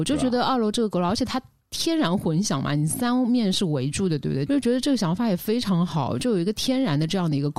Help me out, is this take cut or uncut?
cut